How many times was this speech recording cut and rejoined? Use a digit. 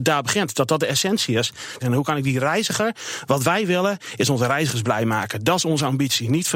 1